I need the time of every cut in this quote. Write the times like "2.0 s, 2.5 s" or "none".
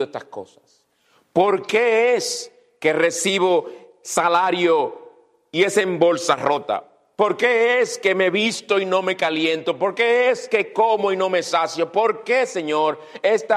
none